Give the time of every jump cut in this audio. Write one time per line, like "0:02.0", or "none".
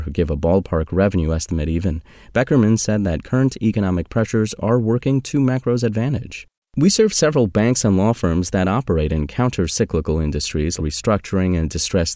0:10.8